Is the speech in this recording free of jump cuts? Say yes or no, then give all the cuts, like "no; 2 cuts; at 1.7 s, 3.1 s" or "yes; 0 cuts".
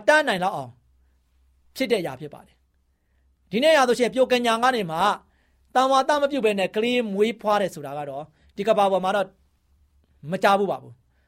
yes; 0 cuts